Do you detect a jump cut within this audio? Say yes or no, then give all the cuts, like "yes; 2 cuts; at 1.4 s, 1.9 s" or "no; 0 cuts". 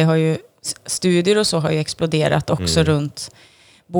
no; 0 cuts